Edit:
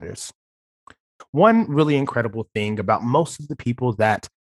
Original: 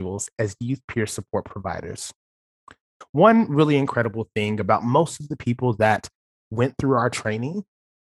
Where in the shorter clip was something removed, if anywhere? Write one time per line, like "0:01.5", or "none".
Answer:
none